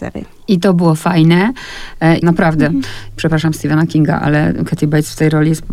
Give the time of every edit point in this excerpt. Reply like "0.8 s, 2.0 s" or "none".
2.2 s